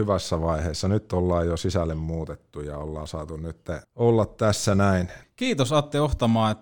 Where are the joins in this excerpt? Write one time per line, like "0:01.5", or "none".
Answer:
0:03.8
0:05.2